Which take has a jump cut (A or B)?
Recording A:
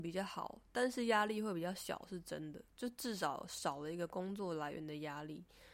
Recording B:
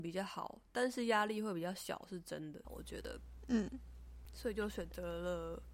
B